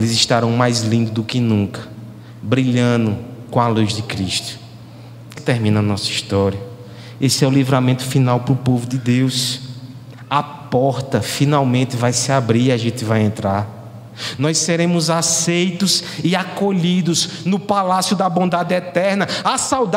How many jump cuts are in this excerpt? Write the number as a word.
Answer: one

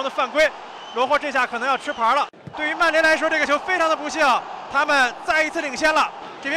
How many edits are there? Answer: two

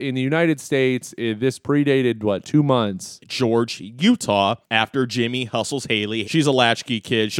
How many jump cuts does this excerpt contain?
two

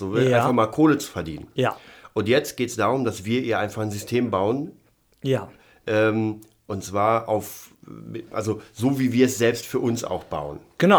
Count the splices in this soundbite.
zero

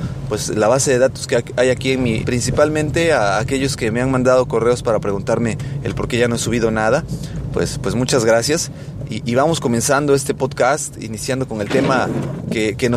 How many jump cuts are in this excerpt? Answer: one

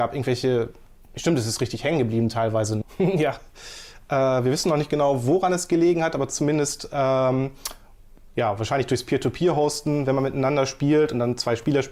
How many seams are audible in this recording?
one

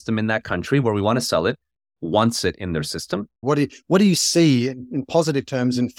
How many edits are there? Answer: one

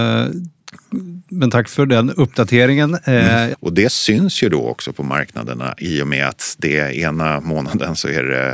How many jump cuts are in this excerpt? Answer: one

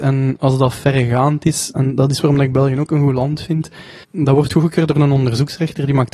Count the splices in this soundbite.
two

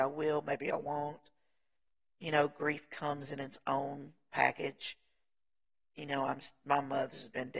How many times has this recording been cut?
zero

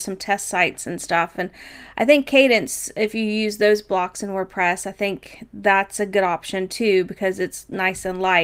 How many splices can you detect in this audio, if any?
zero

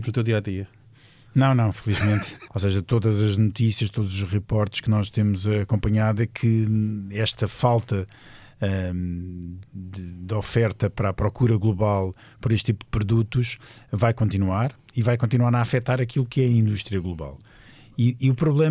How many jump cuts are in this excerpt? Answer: two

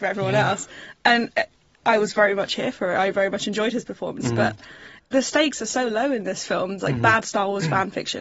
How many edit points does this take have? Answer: one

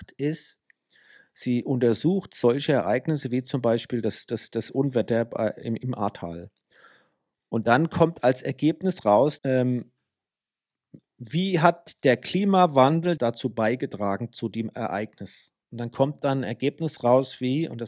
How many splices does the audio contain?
two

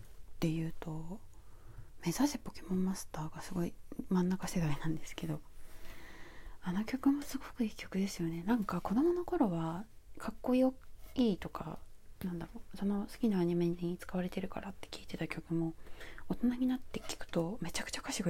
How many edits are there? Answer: zero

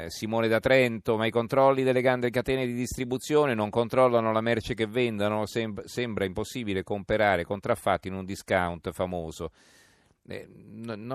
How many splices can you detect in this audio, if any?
zero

